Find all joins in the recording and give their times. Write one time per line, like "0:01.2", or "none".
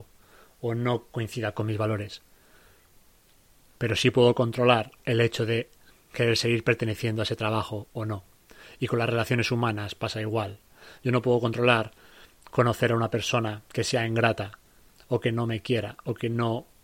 none